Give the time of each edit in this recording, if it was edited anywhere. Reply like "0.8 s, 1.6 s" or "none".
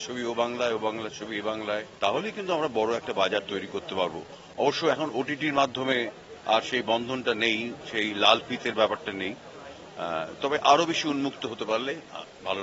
1.9 s